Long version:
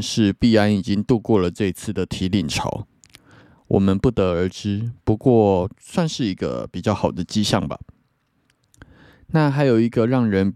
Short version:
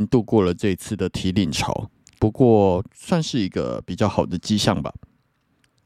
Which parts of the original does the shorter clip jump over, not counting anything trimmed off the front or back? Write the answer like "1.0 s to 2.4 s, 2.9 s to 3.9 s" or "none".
3.1 s to 5.0 s

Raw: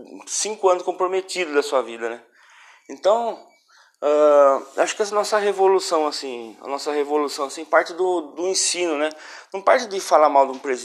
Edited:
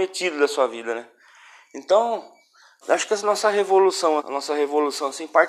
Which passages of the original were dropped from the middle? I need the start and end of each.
4.0 s to 4.7 s, 6.1 s to 6.6 s

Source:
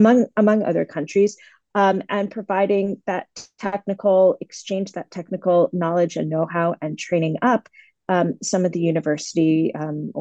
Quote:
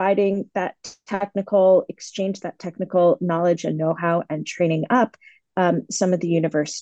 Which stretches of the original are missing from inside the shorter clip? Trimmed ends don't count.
none

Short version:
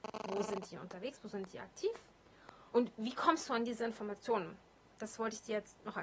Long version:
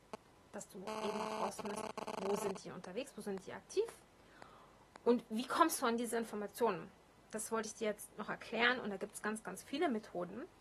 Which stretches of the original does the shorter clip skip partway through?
4.6 s to 5.0 s

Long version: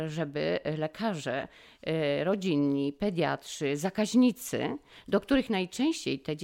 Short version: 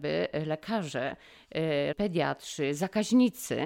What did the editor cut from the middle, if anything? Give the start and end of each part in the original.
2.2 s to 2.9 s

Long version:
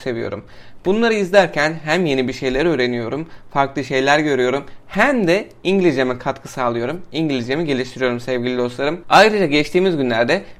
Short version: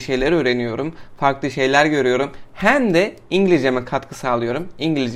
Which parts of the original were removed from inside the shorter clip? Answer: none

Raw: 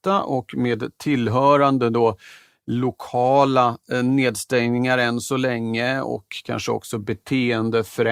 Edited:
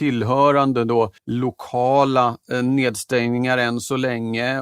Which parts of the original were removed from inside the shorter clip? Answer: 2.2 s to 2.6 s

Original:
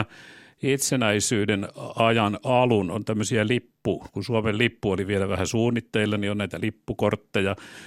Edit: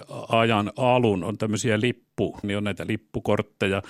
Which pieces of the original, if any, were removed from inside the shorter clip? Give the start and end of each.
4.1 s to 6.2 s

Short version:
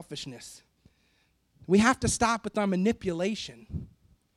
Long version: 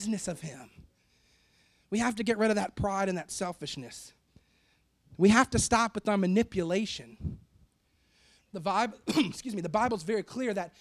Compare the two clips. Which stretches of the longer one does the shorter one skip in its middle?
none

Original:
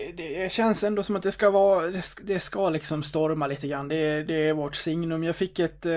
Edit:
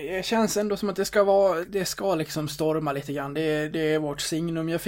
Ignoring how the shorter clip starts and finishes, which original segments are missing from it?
1.9 s to 2.2 s

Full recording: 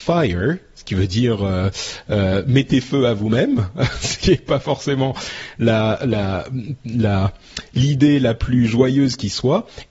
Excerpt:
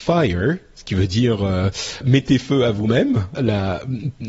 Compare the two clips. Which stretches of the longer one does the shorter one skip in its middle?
2.0 s to 2.4 s, 3.8 s to 6.0 s

